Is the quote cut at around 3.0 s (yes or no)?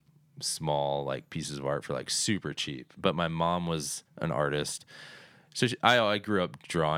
yes